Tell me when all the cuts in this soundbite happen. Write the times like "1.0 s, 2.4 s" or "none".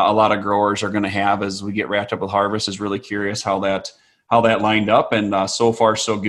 none